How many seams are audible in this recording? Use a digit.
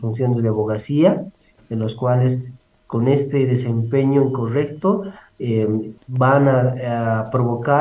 1